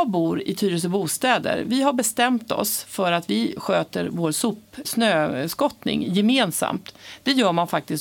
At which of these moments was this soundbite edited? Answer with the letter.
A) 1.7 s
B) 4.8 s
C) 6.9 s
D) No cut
B